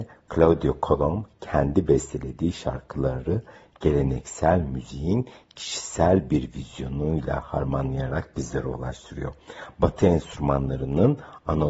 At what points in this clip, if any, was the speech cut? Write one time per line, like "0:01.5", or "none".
none